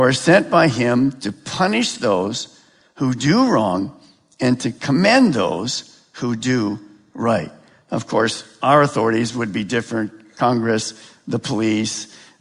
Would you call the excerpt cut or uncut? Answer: uncut